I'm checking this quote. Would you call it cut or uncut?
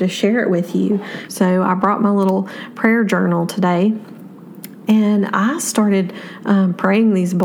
cut